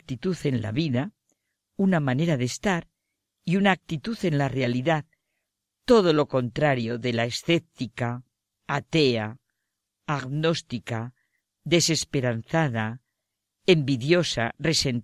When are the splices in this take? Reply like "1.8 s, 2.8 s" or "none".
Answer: none